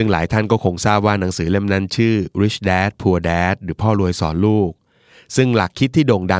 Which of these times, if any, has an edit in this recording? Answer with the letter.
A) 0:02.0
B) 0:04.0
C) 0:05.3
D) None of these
D